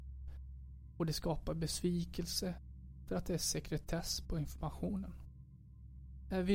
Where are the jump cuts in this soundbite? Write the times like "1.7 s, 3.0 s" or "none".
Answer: none